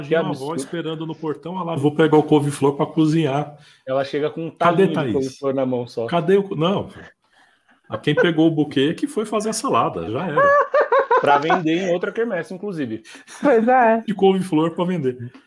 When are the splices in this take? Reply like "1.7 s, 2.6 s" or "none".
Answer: 1.8 s, 10.1 s, 14.1 s